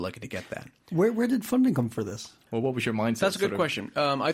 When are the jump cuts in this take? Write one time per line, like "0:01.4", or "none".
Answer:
0:02.5